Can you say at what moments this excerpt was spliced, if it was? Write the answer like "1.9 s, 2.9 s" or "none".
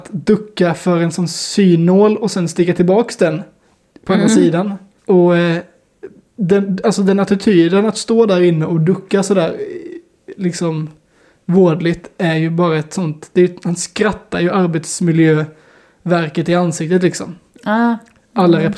5.0 s